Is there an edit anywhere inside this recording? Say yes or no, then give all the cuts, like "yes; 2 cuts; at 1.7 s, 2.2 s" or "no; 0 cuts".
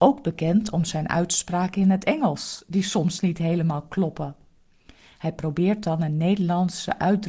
no; 0 cuts